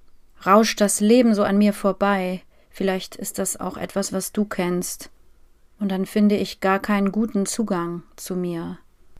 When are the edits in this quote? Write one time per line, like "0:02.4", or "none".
none

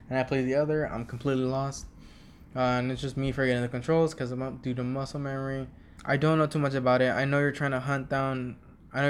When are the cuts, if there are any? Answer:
0:06.0

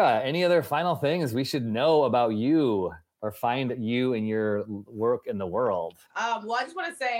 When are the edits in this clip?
0:06.1

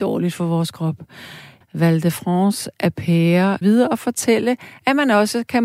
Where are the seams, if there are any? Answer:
0:01.6
0:03.6

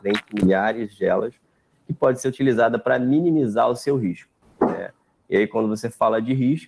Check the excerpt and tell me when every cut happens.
none

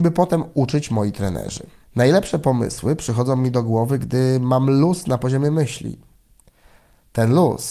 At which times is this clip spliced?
0:01.8

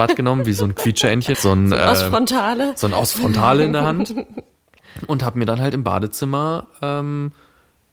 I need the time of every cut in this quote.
0:01.3

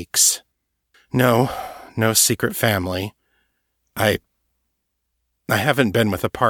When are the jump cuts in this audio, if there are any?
none

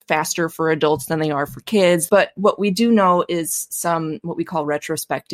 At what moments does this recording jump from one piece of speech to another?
0:02.1

